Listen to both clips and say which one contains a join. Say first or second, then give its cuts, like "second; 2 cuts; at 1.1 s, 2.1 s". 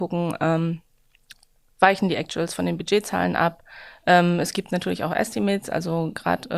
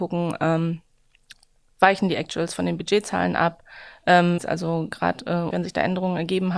second; 2 cuts; at 4.4 s, 5.5 s